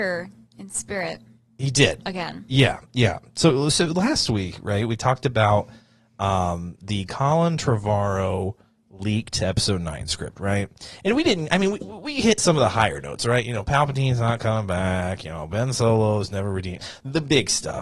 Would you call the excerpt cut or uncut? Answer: uncut